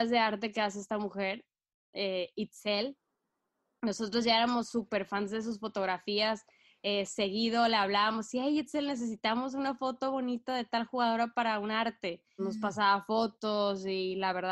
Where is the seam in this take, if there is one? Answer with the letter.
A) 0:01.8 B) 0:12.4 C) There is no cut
B